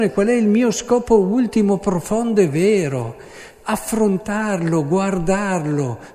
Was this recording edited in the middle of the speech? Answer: no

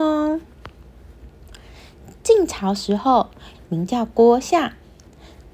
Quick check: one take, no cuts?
no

